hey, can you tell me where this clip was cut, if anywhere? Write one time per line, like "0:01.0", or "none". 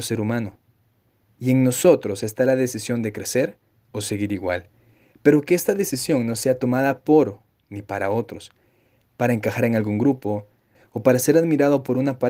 0:10.8